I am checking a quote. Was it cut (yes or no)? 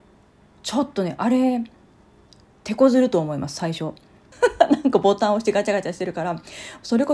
yes